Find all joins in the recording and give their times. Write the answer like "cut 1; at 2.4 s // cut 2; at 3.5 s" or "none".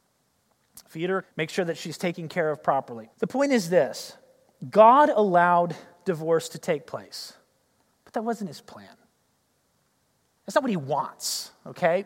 cut 1; at 1.2 s // cut 2; at 3.1 s